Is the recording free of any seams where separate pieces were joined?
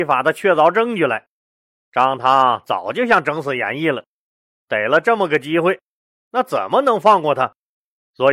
yes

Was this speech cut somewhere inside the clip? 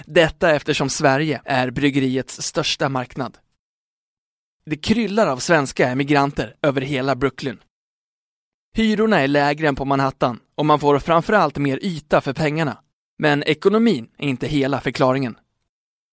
yes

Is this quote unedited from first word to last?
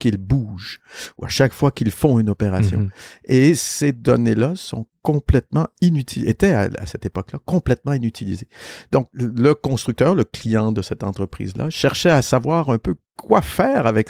yes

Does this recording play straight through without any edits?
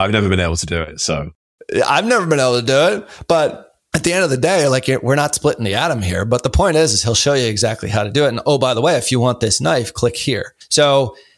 yes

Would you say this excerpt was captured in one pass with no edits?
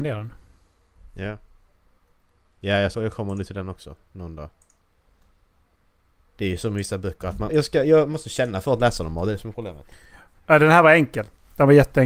no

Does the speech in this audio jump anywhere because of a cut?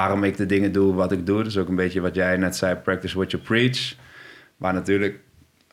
no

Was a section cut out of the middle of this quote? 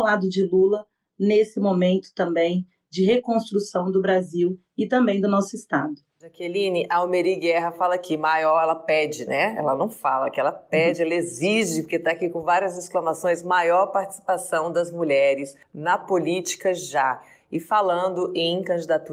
no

